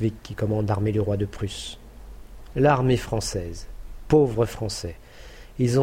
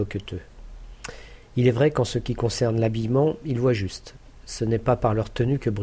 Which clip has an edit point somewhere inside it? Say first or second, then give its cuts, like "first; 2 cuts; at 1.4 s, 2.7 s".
first; 1 cut; at 2.5 s